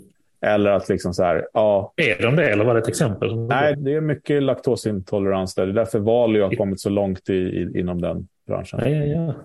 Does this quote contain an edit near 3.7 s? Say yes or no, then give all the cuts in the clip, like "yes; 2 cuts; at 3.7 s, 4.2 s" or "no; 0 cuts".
yes; 1 cut; at 3.7 s